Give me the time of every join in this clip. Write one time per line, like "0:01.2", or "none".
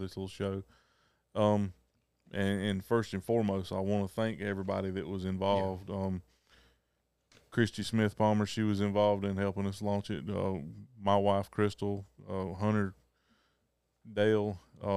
none